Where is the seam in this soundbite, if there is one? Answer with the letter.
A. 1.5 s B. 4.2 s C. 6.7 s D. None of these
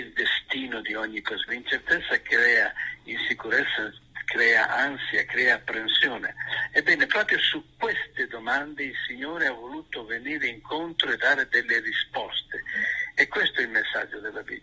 A